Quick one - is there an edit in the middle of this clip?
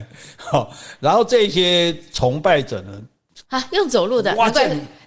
yes; 1 cut; at 3.4 s

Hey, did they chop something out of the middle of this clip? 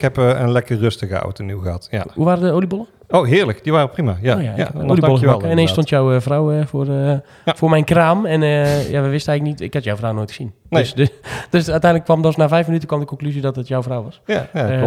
no; 0 cuts

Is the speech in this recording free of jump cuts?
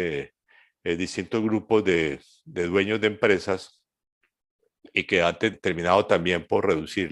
no; 1 cut; at 5.5 s

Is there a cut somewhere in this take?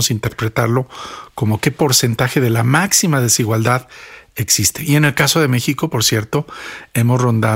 no; 0 cuts

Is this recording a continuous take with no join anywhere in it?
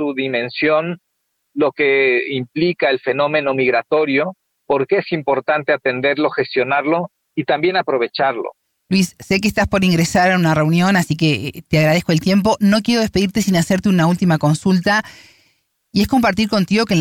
yes; 0 cuts

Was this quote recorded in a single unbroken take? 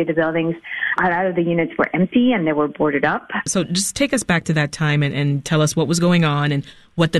no; 1 cut; at 3.5 s

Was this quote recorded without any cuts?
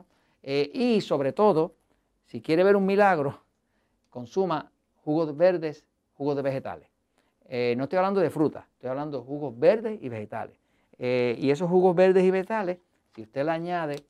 yes; 0 cuts

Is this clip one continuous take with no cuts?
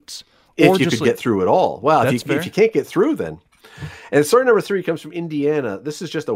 yes; 0 cuts

